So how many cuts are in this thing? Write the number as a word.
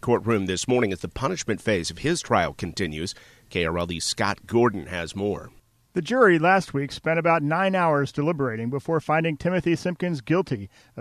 zero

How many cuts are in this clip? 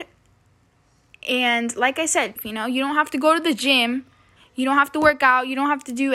two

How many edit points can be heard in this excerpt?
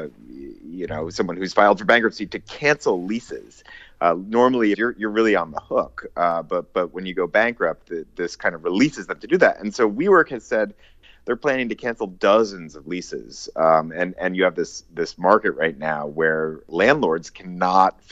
one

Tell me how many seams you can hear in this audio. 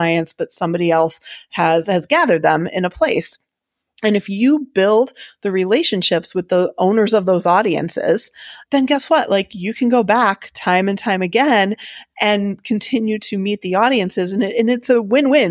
zero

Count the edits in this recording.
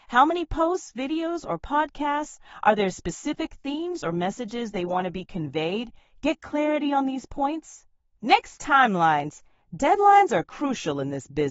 zero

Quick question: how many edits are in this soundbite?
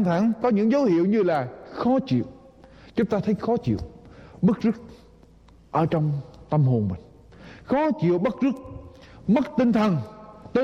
zero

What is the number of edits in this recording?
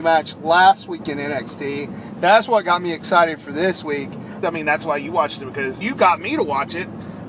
two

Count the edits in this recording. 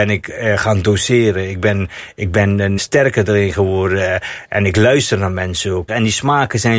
two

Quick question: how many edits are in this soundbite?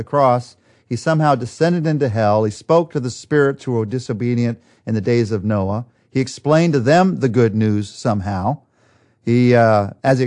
zero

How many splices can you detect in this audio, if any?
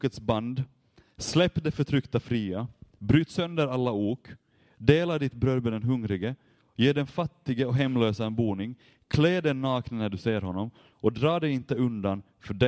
zero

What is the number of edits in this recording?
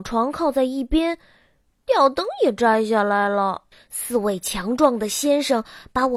zero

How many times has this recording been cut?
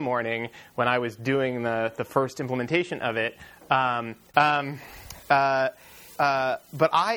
two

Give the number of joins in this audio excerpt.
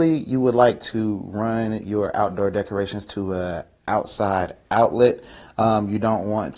zero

